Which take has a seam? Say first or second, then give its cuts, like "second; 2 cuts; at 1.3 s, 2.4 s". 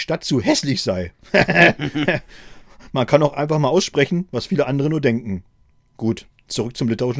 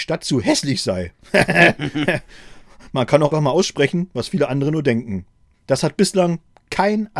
second; 2 cuts; at 3.3 s, 5.5 s